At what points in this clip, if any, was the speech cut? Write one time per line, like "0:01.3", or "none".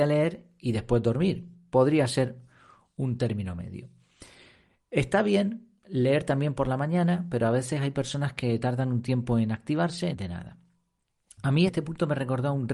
0:10.1
0:11.7